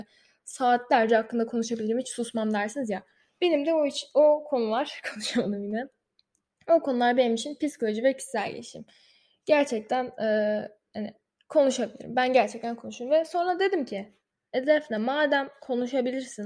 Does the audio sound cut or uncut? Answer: uncut